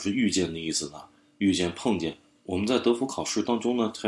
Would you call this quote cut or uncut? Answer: uncut